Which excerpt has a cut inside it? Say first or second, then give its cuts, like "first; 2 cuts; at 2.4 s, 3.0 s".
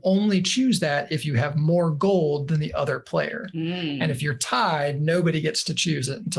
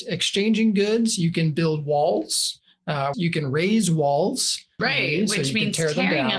second; 2 cuts; at 3.1 s, 4.8 s